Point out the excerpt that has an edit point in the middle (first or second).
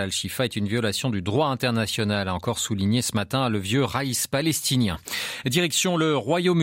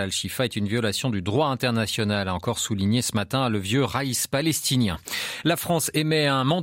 first